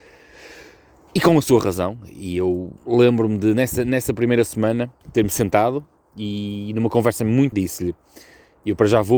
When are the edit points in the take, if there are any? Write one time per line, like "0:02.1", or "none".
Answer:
0:02.8
0:05.0
0:07.5